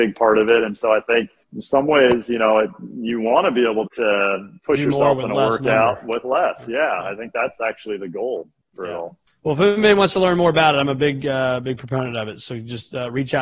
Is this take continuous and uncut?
no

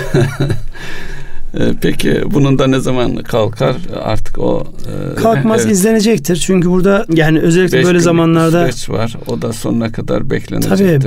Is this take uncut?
no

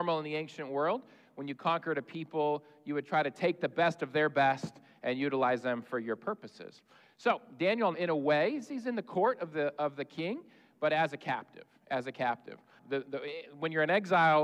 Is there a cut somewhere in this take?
yes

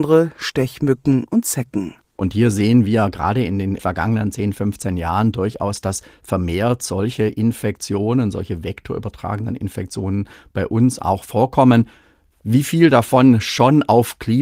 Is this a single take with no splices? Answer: yes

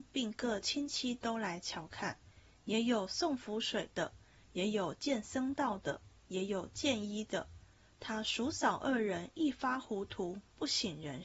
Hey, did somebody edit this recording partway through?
no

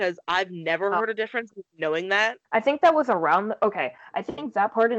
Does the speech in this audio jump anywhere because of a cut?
yes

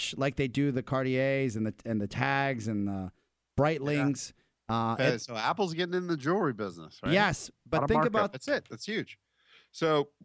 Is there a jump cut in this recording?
yes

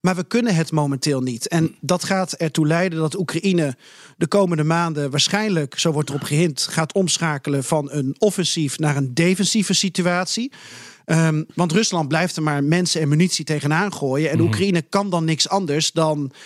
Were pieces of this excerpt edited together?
no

